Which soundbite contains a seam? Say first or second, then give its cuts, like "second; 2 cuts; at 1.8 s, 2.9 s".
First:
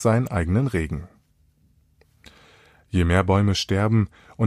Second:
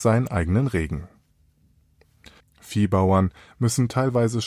second; 1 cut; at 2.4 s